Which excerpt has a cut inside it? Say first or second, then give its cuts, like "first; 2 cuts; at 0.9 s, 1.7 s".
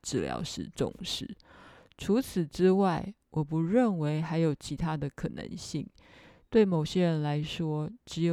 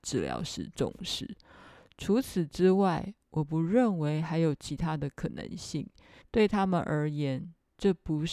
second; 1 cut; at 6.2 s